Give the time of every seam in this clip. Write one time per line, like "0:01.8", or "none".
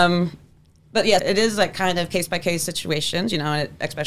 0:01.2

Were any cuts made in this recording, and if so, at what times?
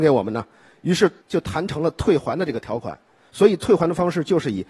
0:03.3

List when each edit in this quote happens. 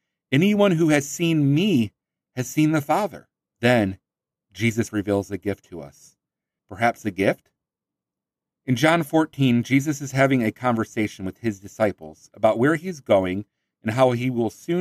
0:03.5
0:06.6

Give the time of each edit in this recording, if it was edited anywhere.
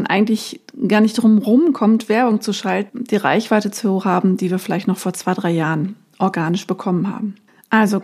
0:02.9

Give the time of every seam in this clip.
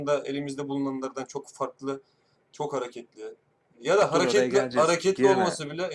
0:02.4

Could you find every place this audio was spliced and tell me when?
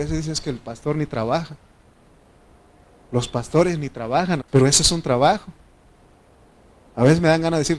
0:04.4

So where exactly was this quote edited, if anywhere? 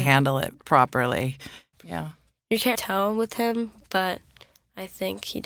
0:01.7
0:02.7

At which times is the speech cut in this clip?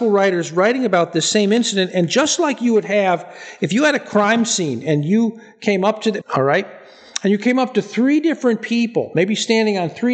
0:06.2

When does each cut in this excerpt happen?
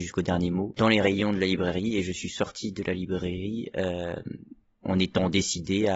none

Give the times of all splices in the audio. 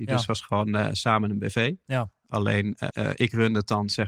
0:02.9

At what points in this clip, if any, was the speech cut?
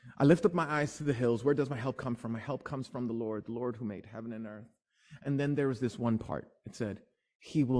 none

